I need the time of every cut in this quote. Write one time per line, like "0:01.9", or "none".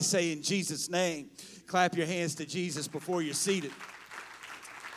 none